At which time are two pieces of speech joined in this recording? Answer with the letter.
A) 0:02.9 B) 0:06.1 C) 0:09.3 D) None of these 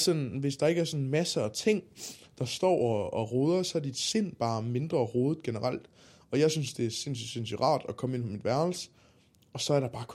D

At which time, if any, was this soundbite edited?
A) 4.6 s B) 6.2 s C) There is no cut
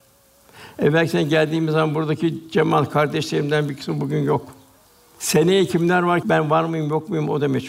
B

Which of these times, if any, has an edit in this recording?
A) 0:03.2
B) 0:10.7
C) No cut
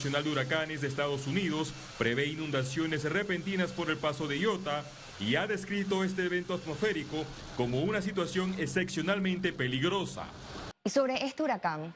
B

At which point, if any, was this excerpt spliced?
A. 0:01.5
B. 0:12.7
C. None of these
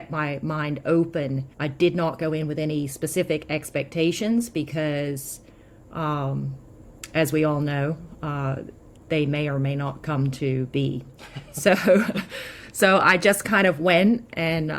A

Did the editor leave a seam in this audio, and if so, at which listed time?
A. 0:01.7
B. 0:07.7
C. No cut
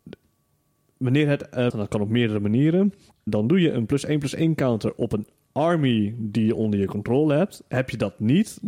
A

